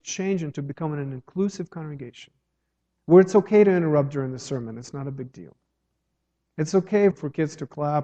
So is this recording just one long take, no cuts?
no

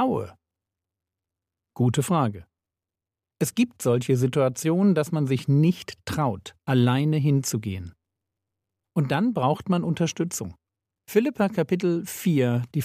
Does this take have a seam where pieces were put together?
yes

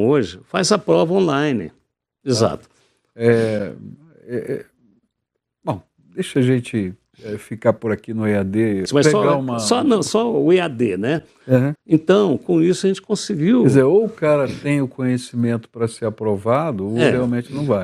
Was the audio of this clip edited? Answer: yes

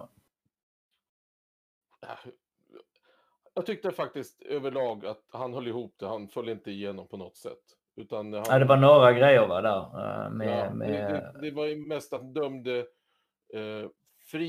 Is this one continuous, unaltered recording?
yes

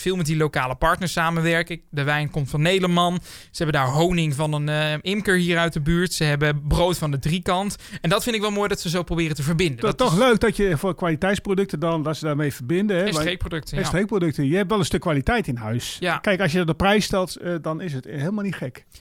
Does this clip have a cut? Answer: no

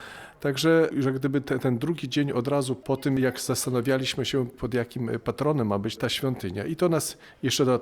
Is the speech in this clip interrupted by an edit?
no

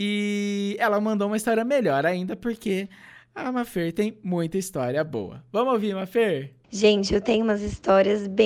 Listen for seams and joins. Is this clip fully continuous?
no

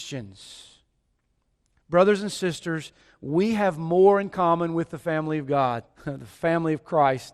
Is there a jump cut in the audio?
yes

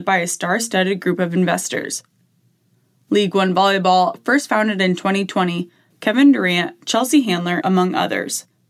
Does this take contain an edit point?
yes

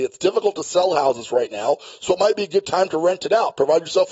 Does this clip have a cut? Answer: no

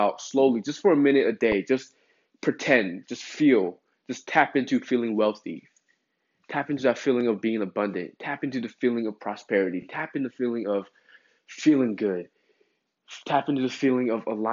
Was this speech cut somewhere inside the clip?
no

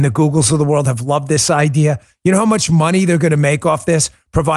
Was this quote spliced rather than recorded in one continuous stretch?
no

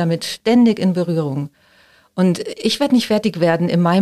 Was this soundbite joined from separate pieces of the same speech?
no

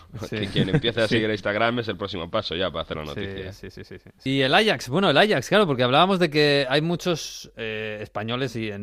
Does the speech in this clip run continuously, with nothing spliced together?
yes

